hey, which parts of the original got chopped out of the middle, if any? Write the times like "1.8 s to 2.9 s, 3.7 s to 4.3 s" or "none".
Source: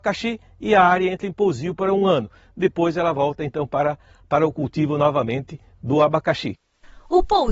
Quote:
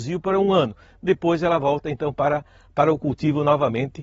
none